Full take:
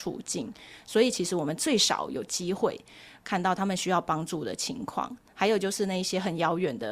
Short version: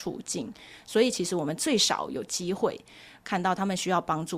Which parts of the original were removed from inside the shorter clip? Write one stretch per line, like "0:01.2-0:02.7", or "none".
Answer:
none